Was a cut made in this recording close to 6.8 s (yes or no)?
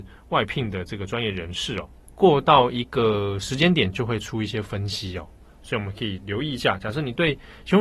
no